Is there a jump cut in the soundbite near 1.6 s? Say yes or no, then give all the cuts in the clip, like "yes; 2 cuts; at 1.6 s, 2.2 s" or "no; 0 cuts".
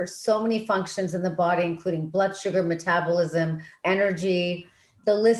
no; 1 cut; at 3.8 s